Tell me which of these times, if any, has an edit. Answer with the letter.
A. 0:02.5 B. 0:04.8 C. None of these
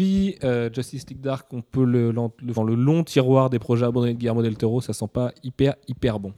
A